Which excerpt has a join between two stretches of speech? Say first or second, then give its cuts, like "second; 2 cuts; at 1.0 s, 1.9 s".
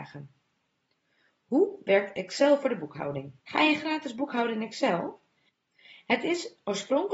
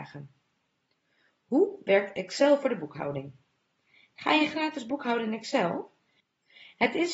first; 1 cut; at 3.4 s